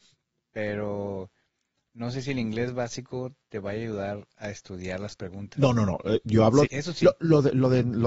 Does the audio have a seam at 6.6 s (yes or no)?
yes